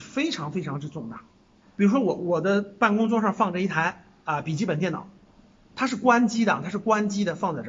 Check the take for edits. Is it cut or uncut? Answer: cut